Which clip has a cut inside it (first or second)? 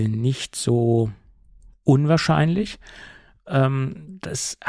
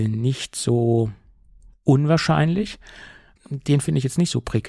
second